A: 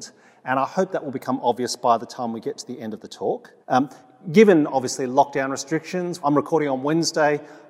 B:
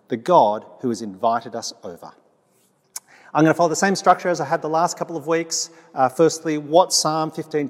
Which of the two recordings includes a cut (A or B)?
A